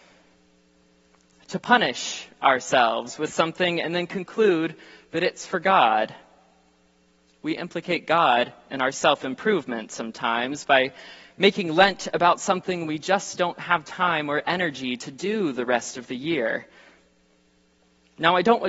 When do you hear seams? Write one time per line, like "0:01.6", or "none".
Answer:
none